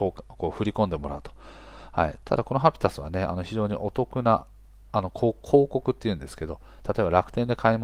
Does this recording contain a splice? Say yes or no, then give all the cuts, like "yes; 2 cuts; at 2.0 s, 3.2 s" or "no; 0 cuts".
yes; 1 cut; at 2.2 s